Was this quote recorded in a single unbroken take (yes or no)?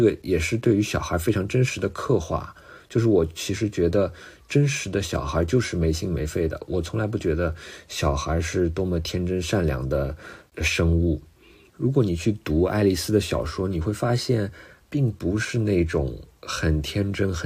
no